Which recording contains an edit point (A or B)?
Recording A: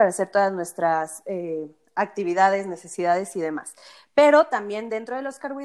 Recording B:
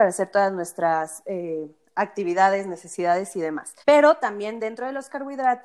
B